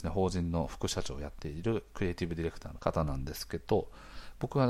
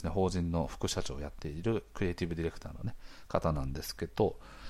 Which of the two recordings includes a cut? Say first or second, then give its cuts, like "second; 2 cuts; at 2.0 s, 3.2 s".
first; 1 cut; at 2.8 s